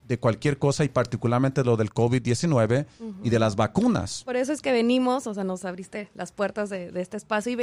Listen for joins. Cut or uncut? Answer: uncut